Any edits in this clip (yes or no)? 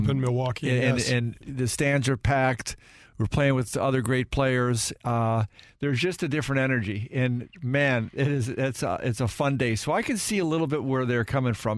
no